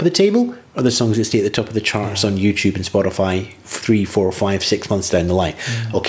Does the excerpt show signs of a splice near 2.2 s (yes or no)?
no